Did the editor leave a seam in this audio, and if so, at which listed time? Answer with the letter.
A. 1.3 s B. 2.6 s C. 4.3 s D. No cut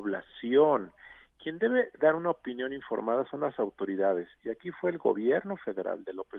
D